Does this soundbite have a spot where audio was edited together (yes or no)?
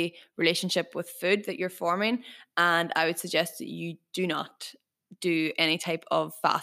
no